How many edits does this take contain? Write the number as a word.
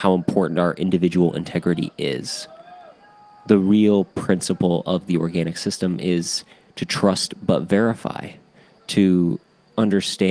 zero